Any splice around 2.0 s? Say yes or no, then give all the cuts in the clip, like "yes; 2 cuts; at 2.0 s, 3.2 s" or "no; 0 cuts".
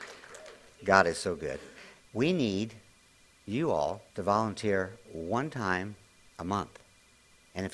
yes; 2 cuts; at 2.0 s, 4.1 s